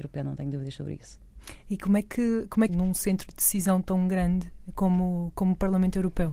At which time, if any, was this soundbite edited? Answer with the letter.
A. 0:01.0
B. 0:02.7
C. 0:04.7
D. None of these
B